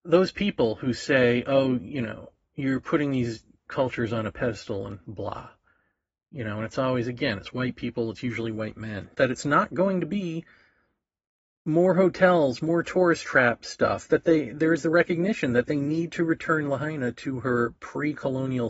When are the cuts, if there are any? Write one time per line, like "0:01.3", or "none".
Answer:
0:09.1